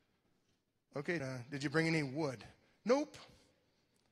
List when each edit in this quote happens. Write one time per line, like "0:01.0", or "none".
0:01.2